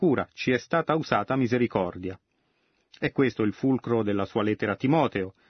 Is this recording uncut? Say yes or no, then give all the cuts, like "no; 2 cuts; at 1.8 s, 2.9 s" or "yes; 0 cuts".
yes; 0 cuts